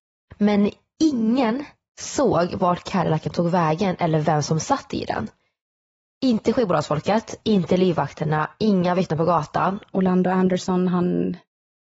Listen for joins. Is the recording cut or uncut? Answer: cut